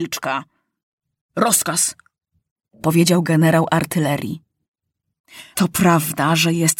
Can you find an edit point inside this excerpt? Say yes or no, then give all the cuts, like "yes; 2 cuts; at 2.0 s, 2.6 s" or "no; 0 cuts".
yes; 1 cut; at 5.5 s